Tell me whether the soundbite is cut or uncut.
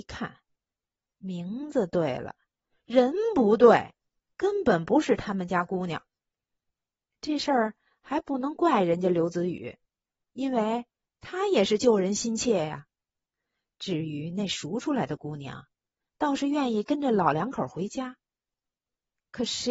uncut